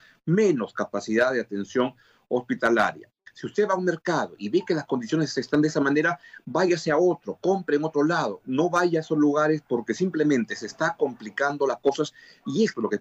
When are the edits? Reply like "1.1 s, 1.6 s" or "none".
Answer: none